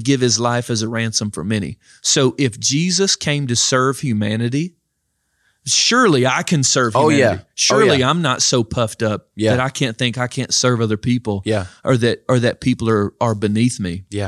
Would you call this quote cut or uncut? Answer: uncut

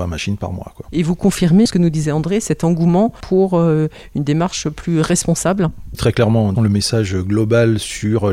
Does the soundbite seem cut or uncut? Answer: cut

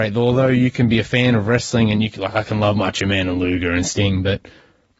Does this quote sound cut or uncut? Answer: uncut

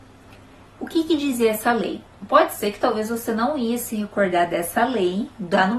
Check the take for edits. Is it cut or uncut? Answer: uncut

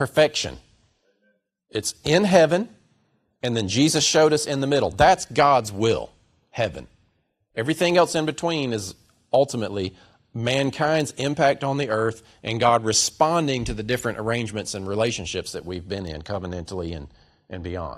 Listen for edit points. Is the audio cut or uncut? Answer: uncut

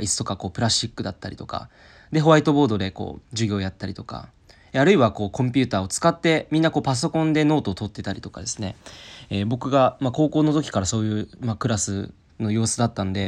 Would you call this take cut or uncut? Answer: uncut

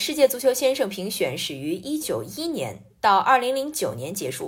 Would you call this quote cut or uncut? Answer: cut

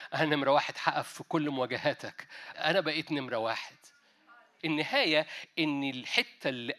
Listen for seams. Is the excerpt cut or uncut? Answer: cut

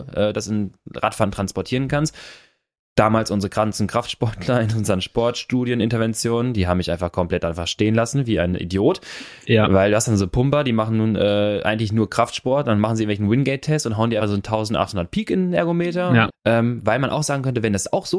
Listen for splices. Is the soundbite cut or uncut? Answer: cut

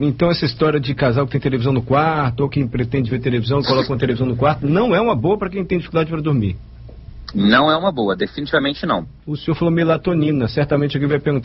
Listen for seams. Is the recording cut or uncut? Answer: cut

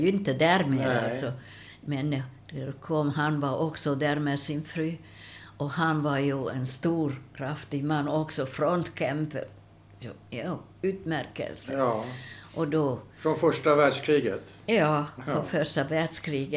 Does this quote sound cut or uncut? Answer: uncut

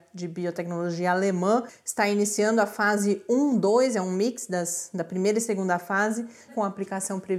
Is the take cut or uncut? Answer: cut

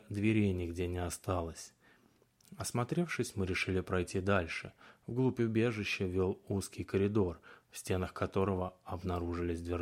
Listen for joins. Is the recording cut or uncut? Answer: uncut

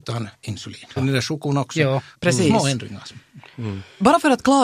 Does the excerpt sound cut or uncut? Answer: cut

